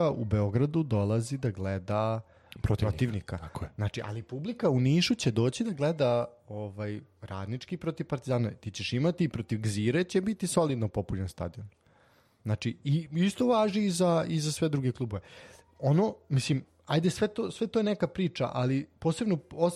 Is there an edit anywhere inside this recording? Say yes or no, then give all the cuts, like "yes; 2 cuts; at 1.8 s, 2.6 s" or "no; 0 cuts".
no; 0 cuts